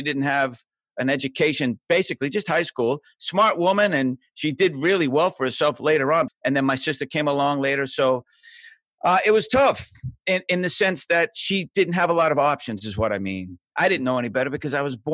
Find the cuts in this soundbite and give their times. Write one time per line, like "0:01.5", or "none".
0:06.3

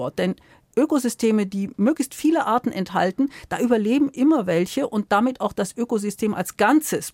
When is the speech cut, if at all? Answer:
none

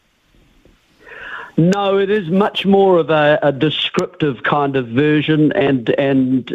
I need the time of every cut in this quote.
none

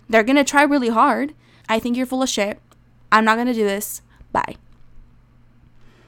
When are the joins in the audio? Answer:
0:01.6

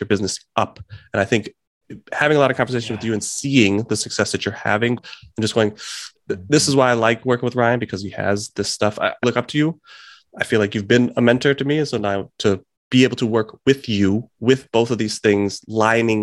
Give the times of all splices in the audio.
0:05.0
0:06.2
0:09.2

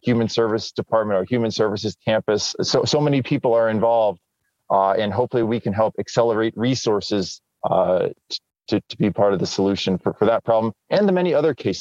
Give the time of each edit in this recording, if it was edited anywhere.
none

